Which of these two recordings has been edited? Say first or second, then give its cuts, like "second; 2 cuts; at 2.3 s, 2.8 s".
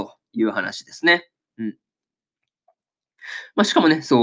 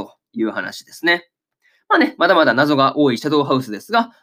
first; 1 cut; at 1.5 s